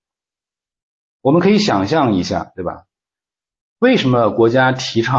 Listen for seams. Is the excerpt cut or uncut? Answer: uncut